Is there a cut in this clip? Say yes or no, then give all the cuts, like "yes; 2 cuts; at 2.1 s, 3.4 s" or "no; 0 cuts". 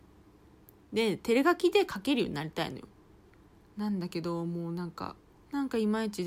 yes; 1 cut; at 5.3 s